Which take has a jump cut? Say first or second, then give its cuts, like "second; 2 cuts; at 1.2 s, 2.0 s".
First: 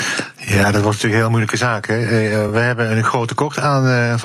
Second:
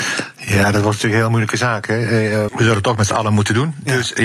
second; 1 cut; at 2.5 s